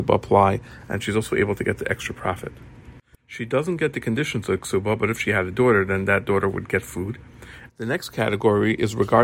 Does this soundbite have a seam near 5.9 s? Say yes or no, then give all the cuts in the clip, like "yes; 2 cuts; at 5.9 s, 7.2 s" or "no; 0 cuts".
no; 2 cuts; at 3.1 s, 7.7 s